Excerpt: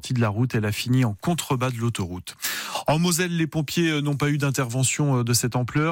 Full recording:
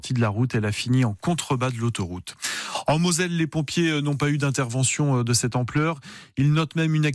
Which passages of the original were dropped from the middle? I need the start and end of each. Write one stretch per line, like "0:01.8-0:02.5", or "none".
none